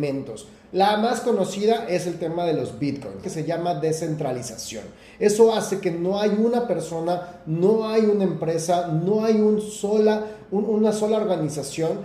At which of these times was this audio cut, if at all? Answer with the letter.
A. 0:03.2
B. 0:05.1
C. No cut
A